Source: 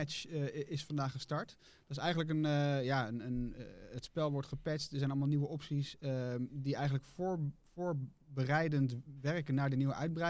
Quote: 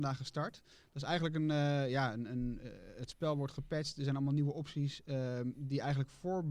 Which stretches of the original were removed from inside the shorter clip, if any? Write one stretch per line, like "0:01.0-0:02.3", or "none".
none